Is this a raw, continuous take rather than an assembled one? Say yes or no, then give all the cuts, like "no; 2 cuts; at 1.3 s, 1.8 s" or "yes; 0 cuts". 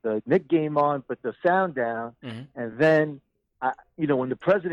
yes; 0 cuts